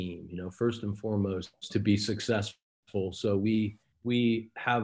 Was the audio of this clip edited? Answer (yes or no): yes